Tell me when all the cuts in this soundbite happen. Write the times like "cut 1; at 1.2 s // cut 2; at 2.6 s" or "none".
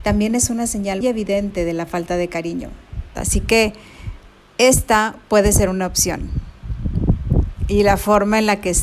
cut 1; at 1.0 s // cut 2; at 3.2 s